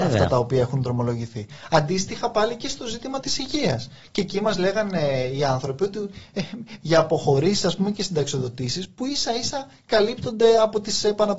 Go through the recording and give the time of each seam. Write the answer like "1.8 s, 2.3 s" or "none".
3.2 s, 6.8 s